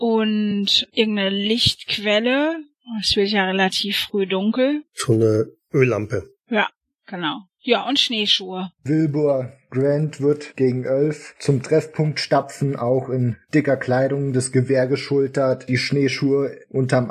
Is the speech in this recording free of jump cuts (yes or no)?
yes